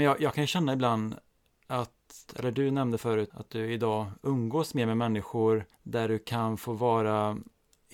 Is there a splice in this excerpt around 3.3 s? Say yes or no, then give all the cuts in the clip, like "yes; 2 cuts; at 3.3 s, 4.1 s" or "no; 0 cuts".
yes; 3 cuts; at 2.3 s, 3.3 s, 5.7 s